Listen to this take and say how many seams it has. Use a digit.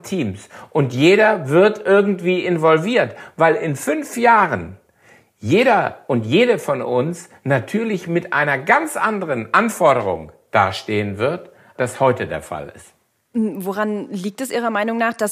2